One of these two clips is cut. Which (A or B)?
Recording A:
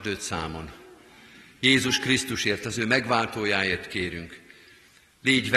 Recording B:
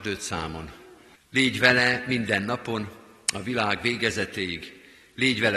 B